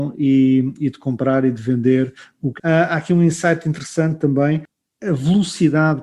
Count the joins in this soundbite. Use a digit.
1